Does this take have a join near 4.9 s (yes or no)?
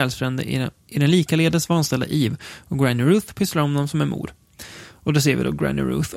no